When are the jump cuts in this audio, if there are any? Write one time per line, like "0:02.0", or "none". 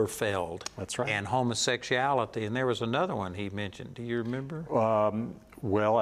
none